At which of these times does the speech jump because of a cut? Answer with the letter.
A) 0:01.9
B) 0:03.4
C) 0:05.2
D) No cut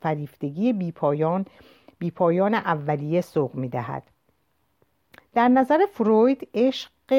C